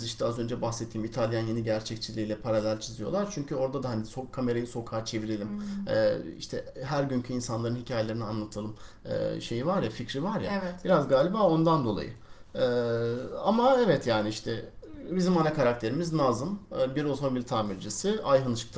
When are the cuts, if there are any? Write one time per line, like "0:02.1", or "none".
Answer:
none